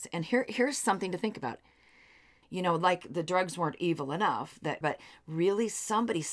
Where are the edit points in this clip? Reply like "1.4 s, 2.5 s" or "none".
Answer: 2.4 s, 4.8 s

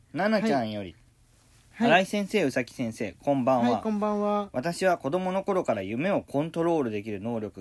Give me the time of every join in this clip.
none

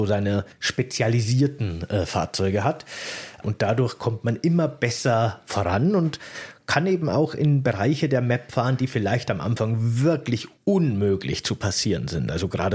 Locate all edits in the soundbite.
3.4 s

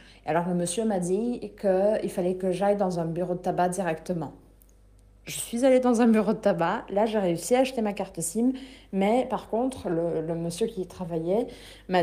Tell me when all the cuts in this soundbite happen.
none

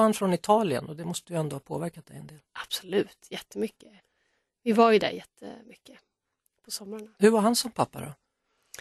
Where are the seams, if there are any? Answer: none

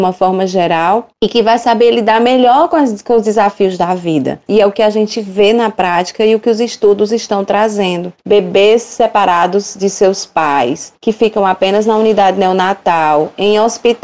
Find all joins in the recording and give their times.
4.5 s

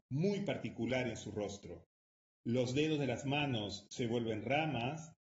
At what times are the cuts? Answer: 2.3 s

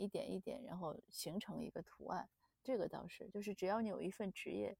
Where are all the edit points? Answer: 2.5 s

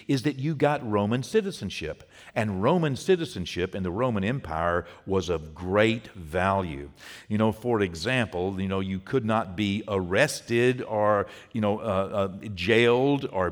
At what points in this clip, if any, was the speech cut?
none

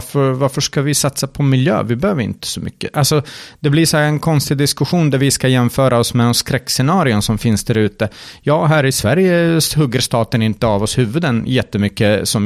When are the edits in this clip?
none

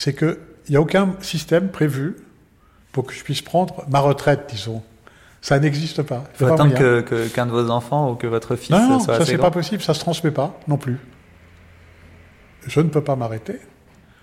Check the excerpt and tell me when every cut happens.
none

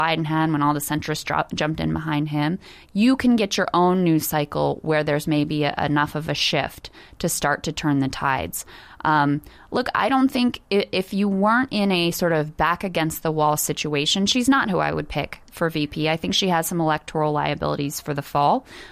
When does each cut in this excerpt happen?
none

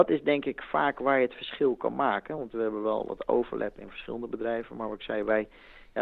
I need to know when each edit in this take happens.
none

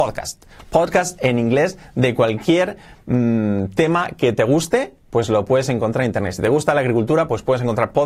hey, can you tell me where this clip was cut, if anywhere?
none

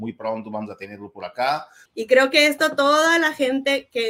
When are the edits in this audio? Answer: 1.8 s

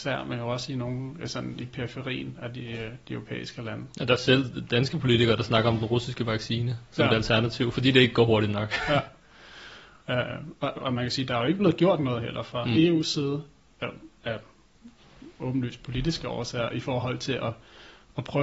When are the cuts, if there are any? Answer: 10.8 s

